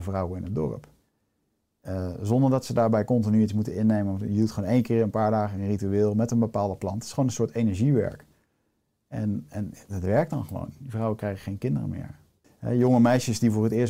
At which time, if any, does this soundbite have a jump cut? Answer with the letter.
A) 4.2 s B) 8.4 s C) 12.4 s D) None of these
C